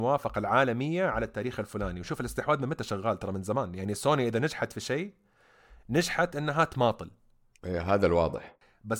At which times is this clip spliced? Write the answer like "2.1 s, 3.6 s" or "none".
none